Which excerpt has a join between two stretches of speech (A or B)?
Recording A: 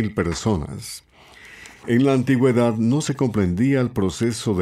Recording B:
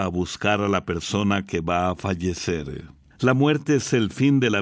B